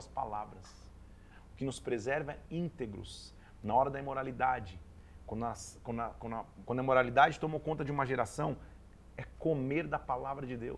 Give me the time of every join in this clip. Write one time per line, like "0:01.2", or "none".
0:06.6